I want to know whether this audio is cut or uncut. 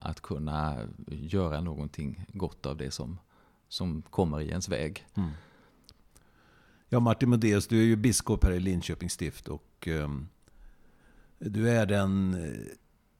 uncut